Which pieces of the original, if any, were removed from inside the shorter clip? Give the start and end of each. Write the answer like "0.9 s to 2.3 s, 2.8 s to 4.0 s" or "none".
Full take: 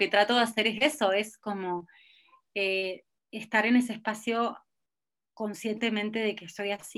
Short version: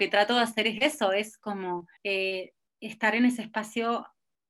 2.0 s to 2.5 s